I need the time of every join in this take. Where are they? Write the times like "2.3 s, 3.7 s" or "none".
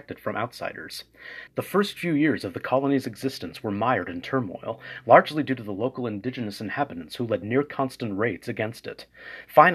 1.5 s